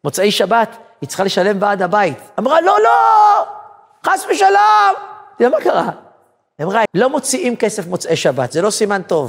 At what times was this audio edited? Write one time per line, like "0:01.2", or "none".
0:02.8
0:06.9